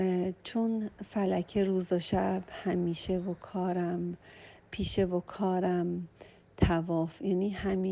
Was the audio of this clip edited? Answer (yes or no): no